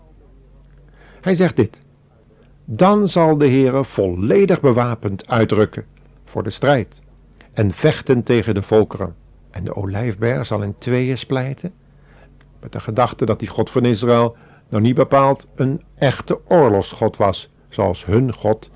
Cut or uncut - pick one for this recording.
cut